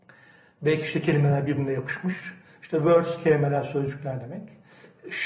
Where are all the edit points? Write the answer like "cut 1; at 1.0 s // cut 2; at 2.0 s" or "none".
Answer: none